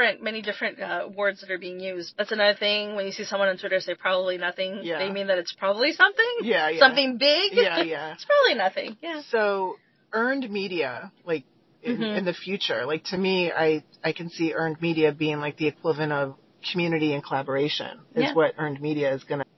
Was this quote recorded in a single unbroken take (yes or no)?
no